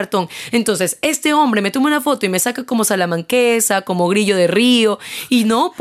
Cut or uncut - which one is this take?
uncut